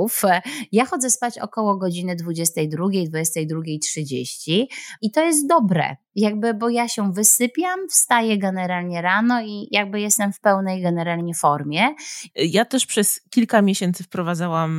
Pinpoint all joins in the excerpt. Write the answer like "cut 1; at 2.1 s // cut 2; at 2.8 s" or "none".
cut 1; at 12.3 s